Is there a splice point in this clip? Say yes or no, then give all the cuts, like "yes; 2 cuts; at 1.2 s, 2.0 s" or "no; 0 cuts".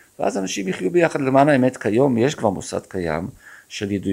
no; 0 cuts